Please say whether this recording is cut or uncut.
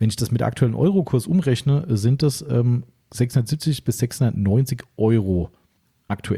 uncut